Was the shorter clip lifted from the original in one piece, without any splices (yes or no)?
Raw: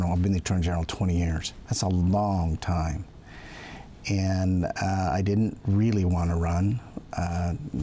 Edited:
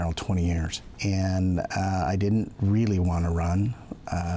no